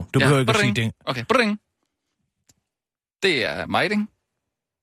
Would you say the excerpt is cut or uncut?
uncut